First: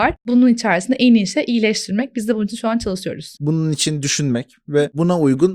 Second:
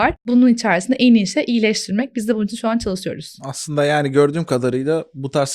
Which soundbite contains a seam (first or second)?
first